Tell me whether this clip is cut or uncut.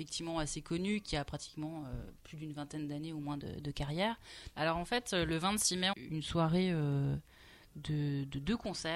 cut